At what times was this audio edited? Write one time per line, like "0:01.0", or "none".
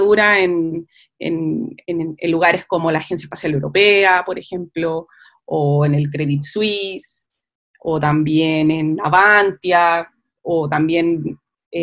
none